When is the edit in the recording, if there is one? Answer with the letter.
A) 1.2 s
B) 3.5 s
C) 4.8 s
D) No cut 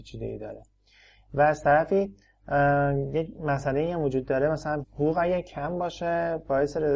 C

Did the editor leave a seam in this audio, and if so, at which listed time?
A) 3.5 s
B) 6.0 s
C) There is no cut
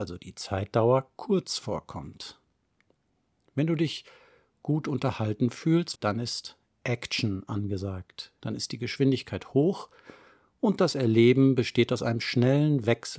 B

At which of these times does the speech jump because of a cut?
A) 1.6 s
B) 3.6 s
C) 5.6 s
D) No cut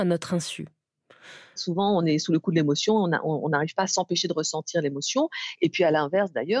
A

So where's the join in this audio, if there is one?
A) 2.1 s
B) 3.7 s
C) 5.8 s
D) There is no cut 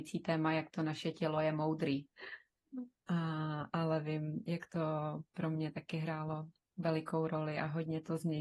A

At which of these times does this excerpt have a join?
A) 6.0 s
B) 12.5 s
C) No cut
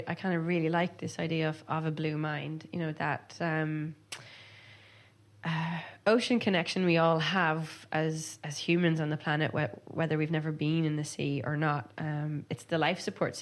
B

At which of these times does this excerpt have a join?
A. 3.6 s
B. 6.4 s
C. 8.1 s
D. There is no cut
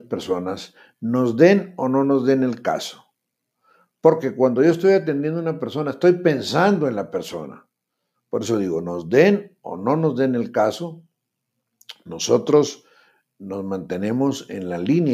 C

